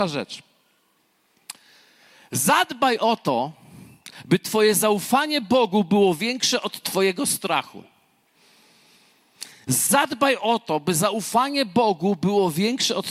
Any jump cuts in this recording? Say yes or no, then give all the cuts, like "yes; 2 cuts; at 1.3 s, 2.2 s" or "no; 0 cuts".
no; 0 cuts